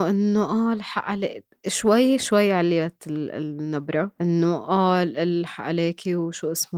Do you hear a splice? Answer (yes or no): yes